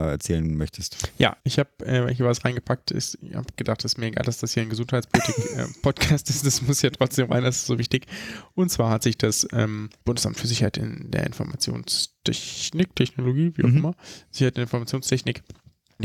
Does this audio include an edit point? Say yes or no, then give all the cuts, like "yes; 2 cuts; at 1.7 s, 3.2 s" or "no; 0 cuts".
no; 0 cuts